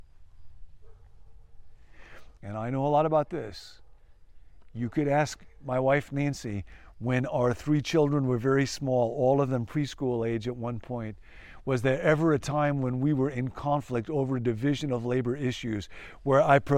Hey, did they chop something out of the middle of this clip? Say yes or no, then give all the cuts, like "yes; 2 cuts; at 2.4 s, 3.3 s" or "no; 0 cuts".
yes; 1 cut; at 2.4 s